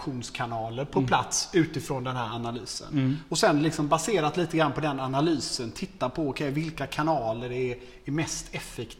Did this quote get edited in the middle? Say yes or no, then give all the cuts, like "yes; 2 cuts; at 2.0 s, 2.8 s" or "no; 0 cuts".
yes; 1 cut; at 3.3 s